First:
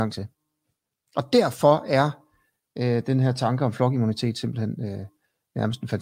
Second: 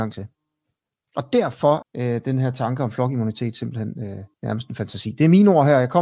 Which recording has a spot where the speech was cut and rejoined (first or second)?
second